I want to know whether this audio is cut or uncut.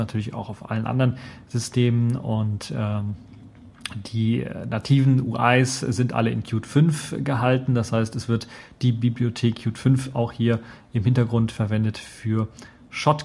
uncut